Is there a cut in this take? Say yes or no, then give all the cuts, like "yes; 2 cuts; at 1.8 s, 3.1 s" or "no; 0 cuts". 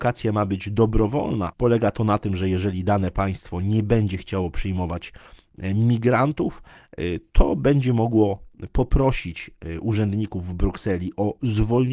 yes; 1 cut; at 1.5 s